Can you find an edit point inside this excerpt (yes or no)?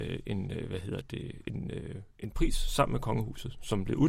no